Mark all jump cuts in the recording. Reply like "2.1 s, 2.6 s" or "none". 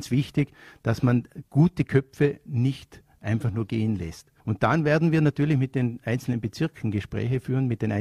4.4 s